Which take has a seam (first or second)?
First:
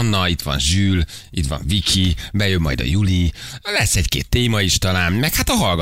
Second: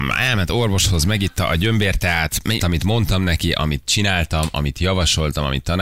second